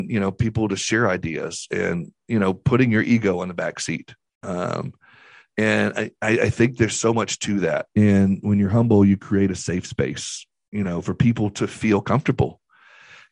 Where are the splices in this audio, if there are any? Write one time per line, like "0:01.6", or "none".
0:07.9